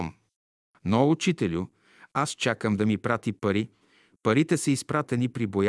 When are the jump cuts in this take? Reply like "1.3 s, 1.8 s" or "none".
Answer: none